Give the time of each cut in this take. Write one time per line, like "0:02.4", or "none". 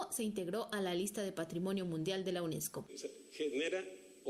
0:02.9